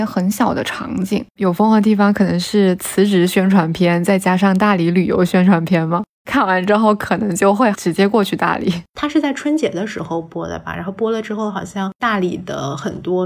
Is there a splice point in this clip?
yes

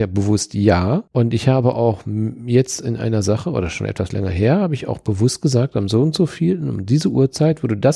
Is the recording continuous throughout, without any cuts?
no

